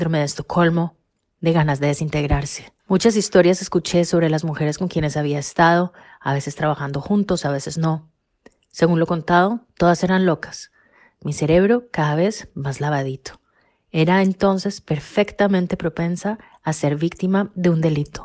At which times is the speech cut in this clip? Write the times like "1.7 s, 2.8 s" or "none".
2.8 s